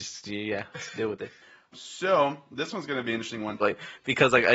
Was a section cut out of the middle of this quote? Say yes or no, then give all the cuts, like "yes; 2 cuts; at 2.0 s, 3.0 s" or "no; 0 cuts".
yes; 2 cuts; at 1.7 s, 3.6 s